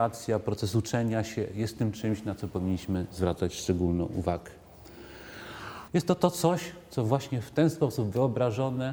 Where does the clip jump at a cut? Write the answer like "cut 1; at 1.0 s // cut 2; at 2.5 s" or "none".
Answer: cut 1; at 5.9 s